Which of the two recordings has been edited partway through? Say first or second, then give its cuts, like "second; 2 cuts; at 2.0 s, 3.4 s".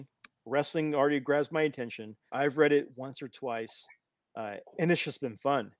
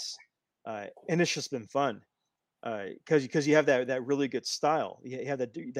first; 1 cut; at 2.3 s